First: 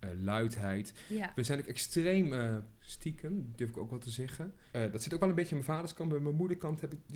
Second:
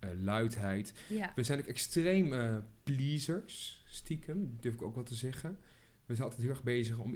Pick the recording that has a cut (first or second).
first